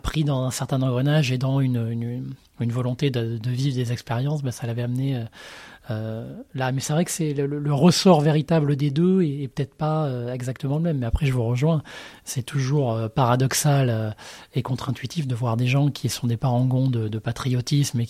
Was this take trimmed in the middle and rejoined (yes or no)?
no